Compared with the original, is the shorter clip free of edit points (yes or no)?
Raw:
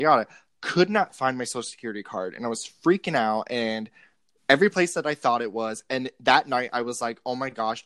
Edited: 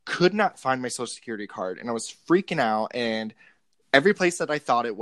yes